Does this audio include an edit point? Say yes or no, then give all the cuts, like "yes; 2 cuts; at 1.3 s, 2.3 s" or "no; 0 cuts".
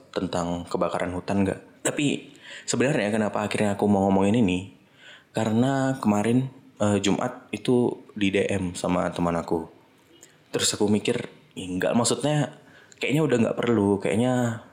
yes; 2 cuts; at 1.8 s, 10.4 s